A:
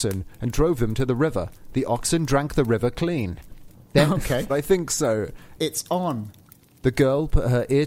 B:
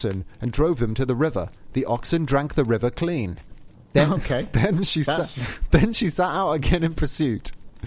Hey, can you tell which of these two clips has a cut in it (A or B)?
A